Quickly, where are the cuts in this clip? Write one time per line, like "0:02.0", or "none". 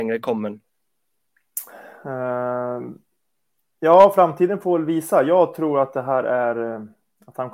none